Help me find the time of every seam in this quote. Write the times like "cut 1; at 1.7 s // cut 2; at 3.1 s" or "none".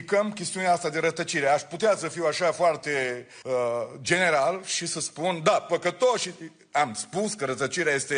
cut 1; at 3.4 s